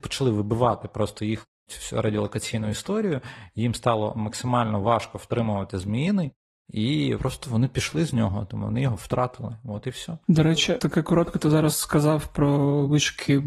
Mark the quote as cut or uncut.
cut